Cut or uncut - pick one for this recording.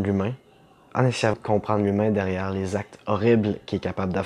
cut